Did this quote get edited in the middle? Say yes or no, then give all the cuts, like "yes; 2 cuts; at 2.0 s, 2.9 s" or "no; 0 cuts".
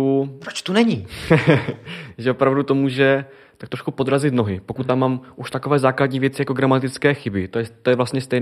no; 0 cuts